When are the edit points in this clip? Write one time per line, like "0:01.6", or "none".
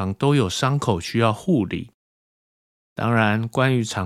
0:02.8